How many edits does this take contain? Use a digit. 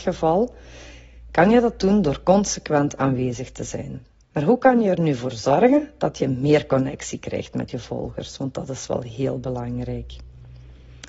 1